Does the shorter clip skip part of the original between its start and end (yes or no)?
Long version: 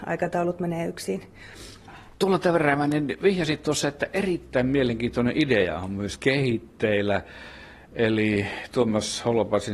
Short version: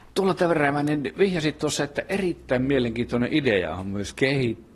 no